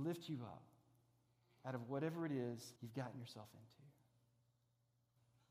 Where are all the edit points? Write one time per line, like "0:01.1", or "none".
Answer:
0:02.8